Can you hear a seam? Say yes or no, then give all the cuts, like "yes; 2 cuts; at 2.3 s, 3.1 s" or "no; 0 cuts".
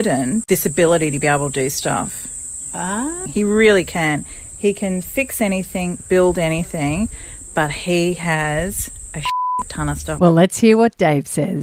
yes; 2 cuts; at 3.3 s, 10.2 s